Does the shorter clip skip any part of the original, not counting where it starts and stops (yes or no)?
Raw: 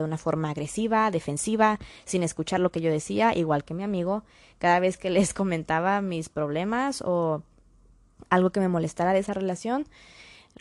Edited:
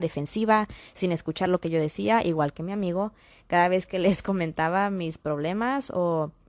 no